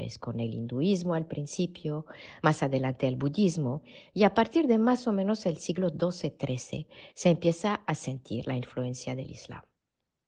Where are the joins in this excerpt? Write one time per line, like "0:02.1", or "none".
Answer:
none